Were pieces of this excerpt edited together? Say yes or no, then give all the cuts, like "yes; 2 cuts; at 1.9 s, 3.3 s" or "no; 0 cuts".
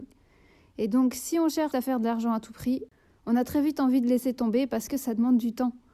yes; 1 cut; at 1.7 s